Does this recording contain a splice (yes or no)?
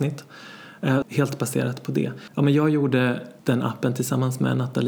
yes